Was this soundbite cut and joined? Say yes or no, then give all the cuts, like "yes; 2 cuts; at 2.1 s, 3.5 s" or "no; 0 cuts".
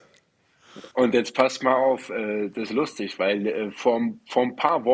yes; 1 cut; at 0.9 s